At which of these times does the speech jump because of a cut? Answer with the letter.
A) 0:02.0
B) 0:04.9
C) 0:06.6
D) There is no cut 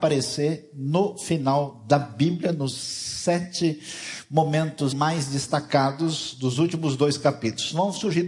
B